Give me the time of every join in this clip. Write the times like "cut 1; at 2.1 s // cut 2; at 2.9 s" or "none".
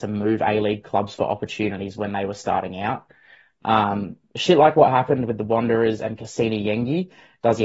none

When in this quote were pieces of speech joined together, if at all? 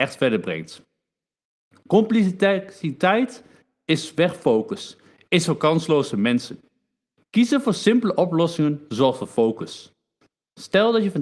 none

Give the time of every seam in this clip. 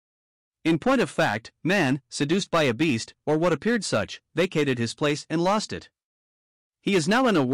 none

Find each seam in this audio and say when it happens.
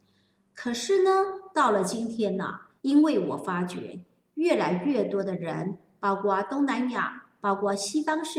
cut 1; at 2.8 s

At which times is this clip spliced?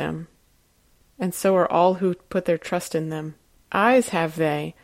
cut 1; at 3.6 s

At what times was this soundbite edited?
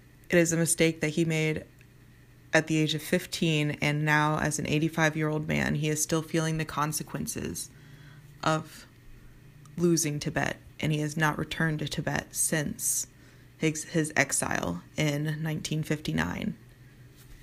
none

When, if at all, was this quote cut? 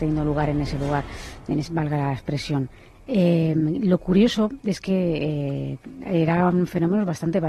none

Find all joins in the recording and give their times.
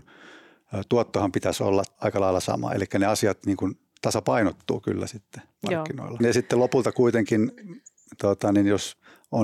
cut 1; at 6.2 s

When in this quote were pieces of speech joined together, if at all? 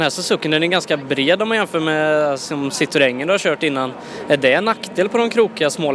none

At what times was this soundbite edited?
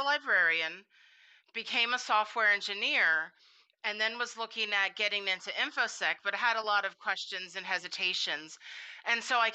none

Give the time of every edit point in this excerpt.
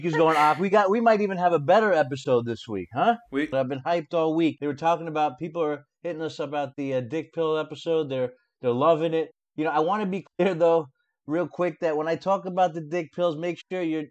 cut 1; at 3.5 s

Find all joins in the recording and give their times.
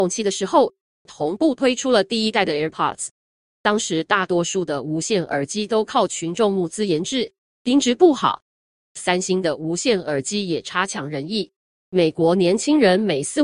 cut 1; at 11.9 s

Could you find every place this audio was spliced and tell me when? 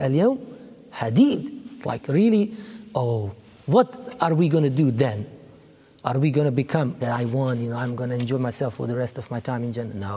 cut 1; at 7.0 s

